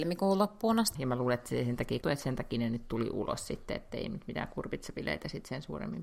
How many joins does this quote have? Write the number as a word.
two